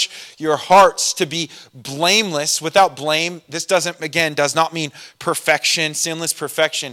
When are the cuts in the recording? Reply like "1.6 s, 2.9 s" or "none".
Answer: none